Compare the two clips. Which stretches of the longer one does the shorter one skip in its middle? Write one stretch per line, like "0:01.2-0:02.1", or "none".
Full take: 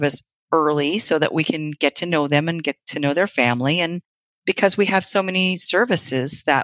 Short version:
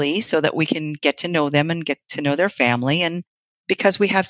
none